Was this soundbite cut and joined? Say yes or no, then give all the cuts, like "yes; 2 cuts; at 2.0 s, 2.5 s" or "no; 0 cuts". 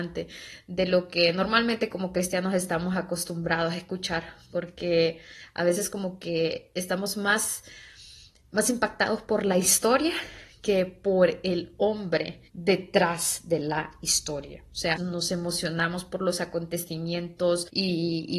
yes; 2 cuts; at 12.5 s, 15.0 s